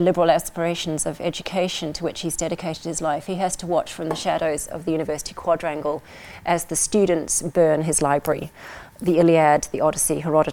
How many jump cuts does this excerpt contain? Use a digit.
0